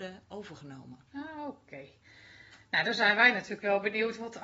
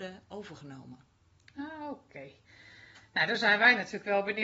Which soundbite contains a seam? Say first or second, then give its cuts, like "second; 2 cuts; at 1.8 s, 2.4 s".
first; 1 cut; at 1.1 s